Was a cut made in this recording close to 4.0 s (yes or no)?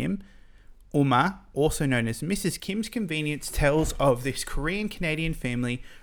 no